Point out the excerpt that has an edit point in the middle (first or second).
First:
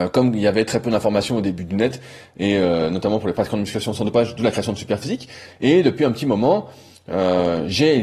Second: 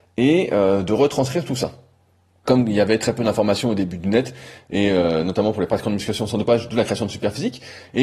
second